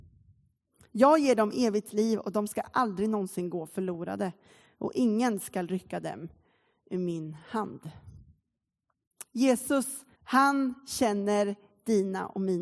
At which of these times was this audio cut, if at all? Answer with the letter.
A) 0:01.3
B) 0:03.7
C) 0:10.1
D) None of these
C